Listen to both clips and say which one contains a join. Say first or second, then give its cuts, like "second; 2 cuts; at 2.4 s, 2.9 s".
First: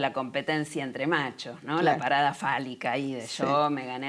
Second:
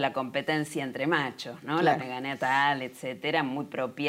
second; 1 cut; at 2.0 s